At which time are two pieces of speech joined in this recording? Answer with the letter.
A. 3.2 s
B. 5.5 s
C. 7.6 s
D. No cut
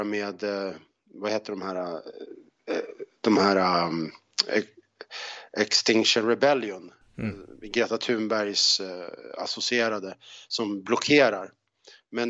D